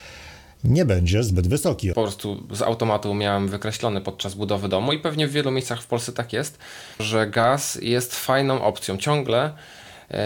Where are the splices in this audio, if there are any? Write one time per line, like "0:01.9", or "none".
0:01.9
0:07.0